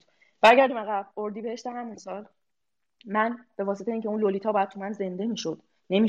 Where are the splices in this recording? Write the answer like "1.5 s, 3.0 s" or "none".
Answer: none